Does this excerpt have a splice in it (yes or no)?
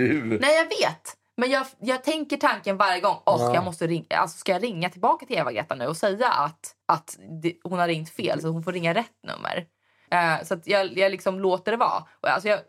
yes